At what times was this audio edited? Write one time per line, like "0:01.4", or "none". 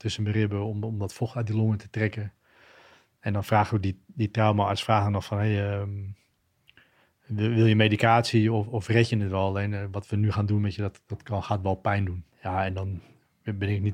0:12.3